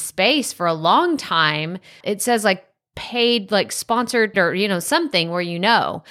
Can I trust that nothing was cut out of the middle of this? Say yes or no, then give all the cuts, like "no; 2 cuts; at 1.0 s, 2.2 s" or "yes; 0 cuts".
no; 2 cuts; at 2.0 s, 4.3 s